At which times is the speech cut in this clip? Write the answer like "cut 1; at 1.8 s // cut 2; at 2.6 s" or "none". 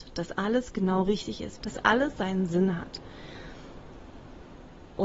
cut 1; at 1.6 s